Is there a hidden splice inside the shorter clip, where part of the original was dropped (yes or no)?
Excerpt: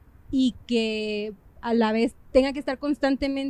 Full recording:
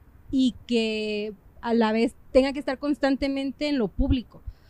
no